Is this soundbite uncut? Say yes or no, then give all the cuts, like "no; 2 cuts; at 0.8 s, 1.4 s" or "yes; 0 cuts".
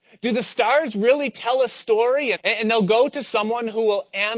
no; 1 cut; at 2.3 s